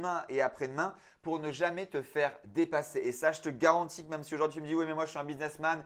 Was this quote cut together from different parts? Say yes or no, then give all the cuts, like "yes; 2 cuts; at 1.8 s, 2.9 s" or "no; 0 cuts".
no; 0 cuts